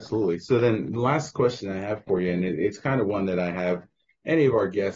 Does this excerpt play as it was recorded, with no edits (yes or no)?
yes